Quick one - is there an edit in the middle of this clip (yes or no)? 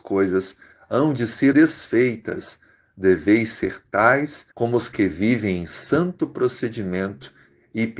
yes